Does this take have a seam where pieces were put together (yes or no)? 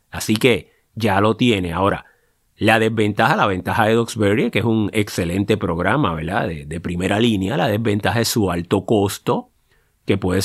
no